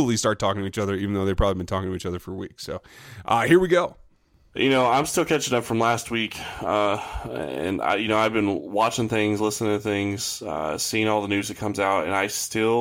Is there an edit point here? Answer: no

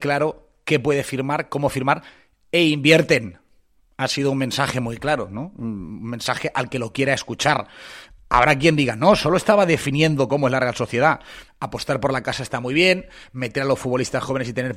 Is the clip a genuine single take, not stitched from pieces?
no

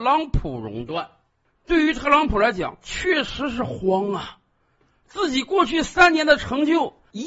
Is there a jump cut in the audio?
no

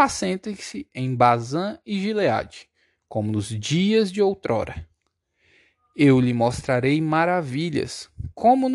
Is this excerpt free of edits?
yes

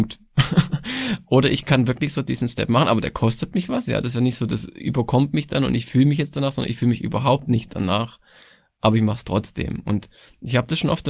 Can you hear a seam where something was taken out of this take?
no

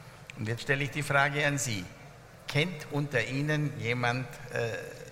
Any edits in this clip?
no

